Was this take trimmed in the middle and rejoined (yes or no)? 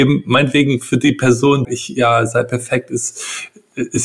yes